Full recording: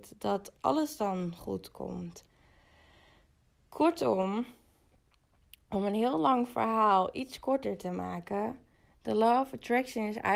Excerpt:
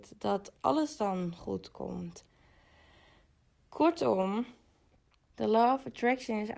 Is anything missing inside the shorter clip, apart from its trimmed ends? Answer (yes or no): yes